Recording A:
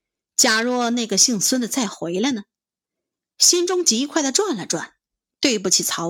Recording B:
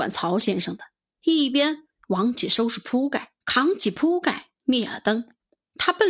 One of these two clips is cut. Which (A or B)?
B